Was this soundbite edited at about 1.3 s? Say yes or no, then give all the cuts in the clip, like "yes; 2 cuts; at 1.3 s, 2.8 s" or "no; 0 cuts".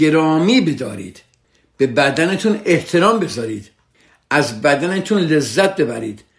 no; 0 cuts